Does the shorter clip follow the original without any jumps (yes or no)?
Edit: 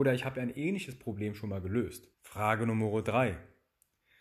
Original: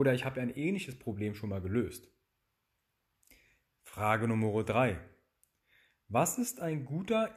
no